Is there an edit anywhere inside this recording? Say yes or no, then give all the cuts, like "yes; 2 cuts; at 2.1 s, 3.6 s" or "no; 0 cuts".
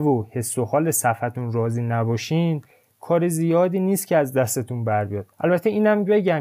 yes; 1 cut; at 5.3 s